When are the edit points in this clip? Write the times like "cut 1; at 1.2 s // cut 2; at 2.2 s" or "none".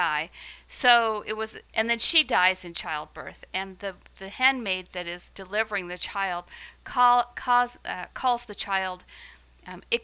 cut 1; at 1.7 s